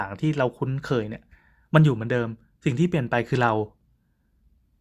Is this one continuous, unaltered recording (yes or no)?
yes